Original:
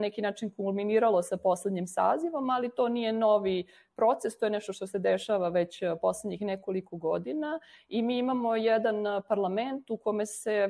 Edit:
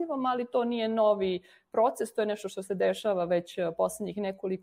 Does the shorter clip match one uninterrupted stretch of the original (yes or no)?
yes